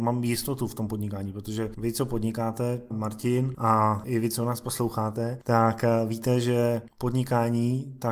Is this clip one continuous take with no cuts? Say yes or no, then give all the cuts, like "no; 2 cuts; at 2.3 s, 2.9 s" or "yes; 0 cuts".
no; 1 cut; at 2.9 s